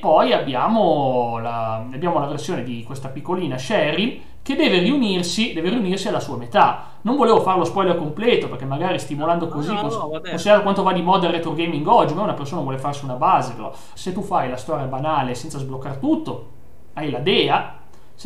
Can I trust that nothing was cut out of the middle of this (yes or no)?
no